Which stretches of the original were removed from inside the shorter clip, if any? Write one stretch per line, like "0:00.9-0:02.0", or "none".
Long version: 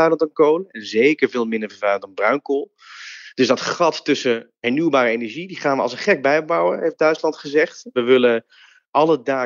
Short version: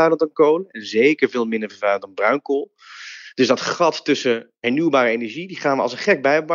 none